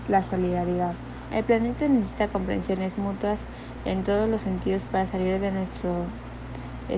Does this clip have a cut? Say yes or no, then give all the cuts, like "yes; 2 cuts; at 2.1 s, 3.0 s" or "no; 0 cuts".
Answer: yes; 1 cut; at 1.3 s